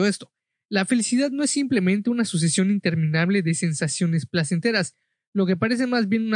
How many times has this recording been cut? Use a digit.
0